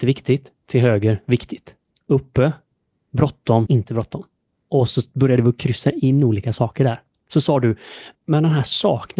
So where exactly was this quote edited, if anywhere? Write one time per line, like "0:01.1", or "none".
0:03.7
0:08.1